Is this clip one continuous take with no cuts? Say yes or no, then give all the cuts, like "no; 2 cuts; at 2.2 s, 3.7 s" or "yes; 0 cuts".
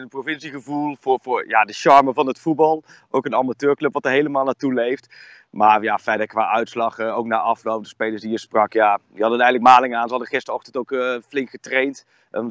yes; 0 cuts